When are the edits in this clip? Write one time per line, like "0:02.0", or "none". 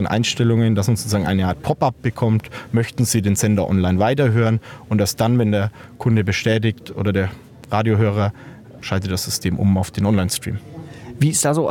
0:08.8